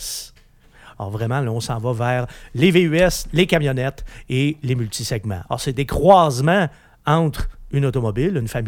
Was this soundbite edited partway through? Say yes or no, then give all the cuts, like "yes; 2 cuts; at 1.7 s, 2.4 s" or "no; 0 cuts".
yes; 2 cuts; at 0.9 s, 5.5 s